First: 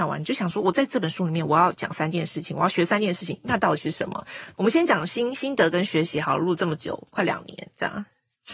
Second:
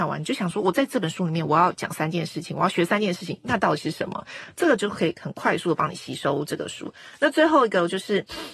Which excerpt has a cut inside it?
first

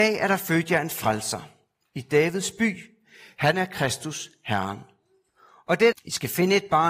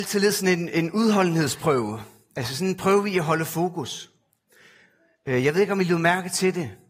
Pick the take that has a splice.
first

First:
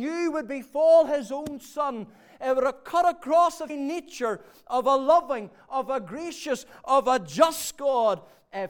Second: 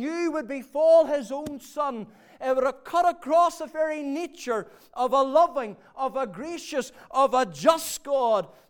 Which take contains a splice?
first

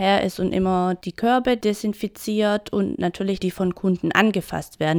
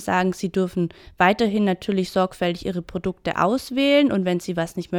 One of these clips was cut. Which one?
first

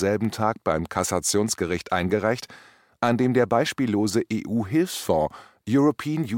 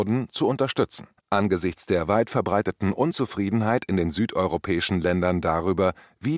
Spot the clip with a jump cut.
second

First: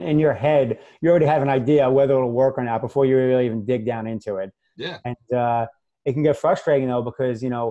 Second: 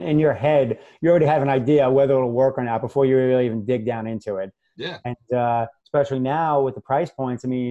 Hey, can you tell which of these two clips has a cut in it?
second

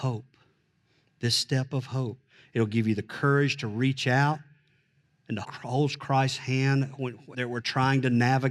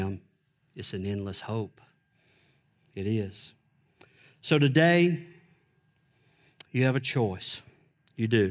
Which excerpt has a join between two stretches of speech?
first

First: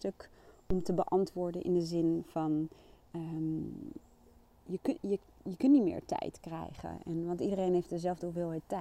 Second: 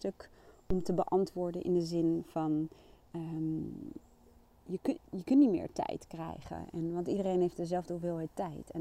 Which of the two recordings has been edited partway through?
second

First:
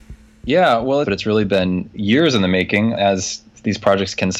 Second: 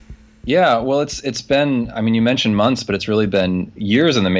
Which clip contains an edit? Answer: first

